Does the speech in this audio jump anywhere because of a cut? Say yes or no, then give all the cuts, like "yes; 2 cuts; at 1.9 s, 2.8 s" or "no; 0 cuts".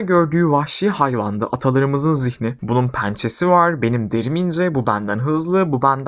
no; 0 cuts